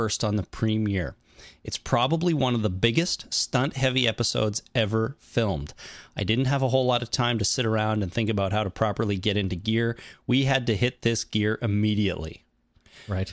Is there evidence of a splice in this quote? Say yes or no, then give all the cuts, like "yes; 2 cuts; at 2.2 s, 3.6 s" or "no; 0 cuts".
no; 0 cuts